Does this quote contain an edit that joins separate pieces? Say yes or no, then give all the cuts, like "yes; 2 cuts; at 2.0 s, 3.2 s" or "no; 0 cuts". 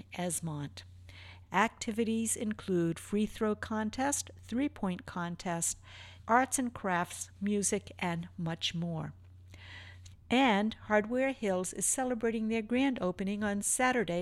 yes; 3 cuts; at 1.4 s, 6.2 s, 10.1 s